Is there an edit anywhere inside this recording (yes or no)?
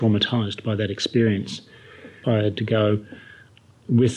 yes